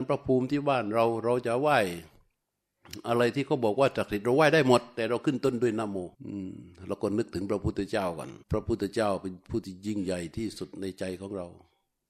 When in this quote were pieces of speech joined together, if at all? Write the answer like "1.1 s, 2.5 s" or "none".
6.1 s, 8.4 s